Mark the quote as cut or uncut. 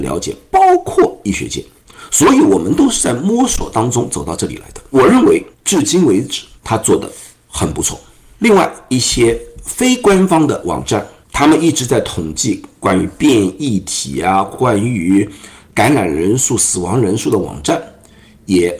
uncut